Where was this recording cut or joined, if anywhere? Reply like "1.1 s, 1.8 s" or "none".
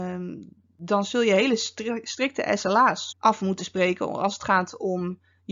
3.1 s